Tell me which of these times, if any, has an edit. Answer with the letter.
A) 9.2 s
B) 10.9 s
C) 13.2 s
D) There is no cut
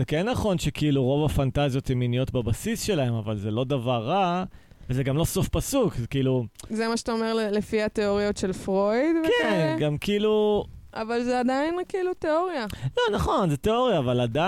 D